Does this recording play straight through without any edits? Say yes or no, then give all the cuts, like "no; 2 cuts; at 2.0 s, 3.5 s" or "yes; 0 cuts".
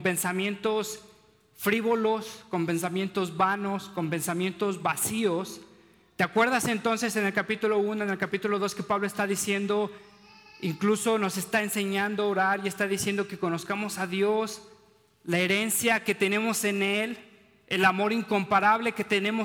yes; 0 cuts